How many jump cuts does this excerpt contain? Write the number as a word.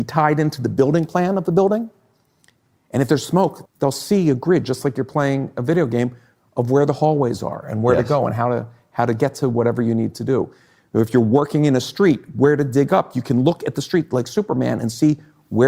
one